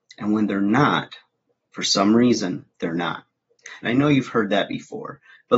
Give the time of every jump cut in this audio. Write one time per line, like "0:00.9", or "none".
0:03.8